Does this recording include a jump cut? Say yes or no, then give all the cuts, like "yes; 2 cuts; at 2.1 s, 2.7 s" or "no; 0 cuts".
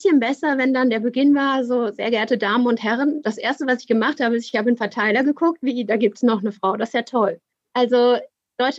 no; 0 cuts